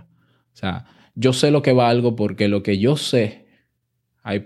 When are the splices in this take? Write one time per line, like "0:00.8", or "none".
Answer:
none